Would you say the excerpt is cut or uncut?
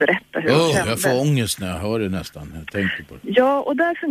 uncut